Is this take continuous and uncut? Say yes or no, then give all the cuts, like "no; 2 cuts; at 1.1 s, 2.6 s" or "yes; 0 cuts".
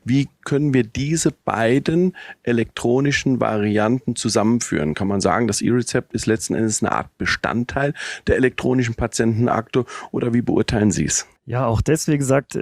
no; 1 cut; at 11.4 s